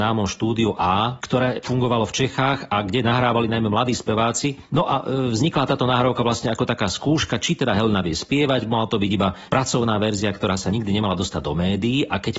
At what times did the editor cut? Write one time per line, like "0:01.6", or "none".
none